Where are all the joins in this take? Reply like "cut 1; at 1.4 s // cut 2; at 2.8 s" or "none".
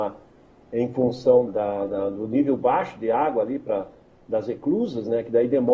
cut 1; at 1.5 s